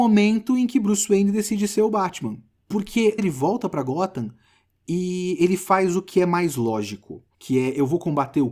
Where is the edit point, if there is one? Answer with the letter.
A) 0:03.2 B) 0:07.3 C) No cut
A